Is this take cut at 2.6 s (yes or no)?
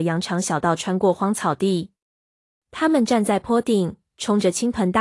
yes